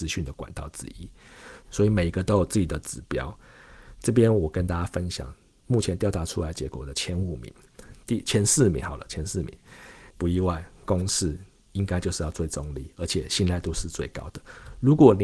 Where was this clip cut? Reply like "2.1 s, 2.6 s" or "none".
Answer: 1.6 s, 10.1 s